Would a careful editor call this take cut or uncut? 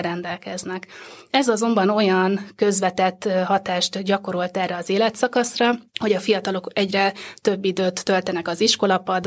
cut